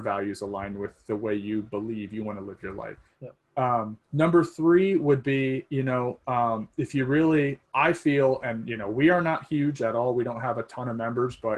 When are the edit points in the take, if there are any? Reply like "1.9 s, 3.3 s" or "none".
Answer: 3.1 s